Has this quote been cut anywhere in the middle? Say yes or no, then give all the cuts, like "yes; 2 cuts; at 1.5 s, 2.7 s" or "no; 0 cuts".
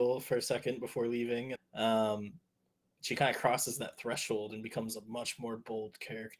yes; 1 cut; at 1.6 s